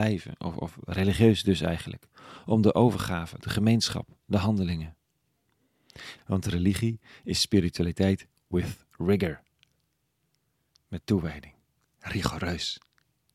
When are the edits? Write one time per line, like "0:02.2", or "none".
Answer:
0:03.4
0:06.2